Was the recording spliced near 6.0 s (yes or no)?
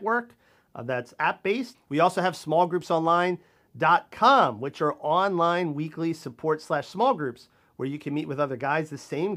no